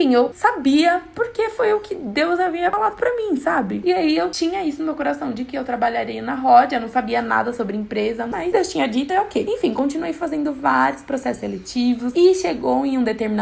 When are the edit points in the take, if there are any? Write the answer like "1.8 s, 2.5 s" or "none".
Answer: 9.1 s